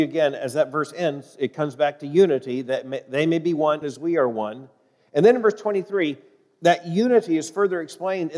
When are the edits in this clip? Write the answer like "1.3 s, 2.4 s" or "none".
3.8 s